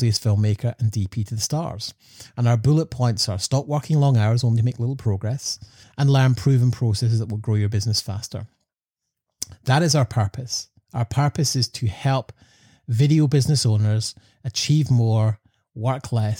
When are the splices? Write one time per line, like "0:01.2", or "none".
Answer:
0:05.8